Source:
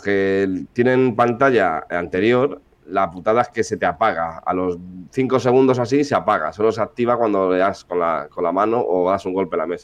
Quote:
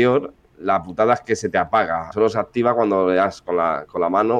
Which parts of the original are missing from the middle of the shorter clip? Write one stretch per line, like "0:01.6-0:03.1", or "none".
0:04.4-0:06.5